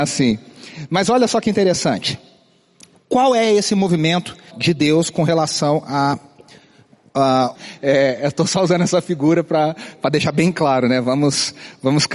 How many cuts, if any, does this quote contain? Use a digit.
2